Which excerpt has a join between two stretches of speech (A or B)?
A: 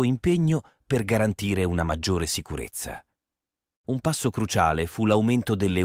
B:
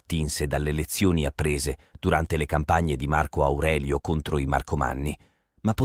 A